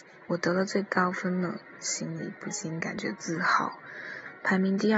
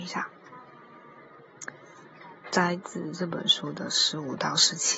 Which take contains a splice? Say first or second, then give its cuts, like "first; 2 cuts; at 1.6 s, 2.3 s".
second; 1 cut; at 2.4 s